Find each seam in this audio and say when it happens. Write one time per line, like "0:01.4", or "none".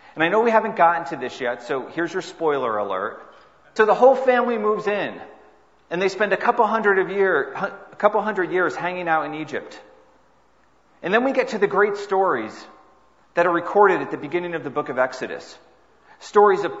0:03.8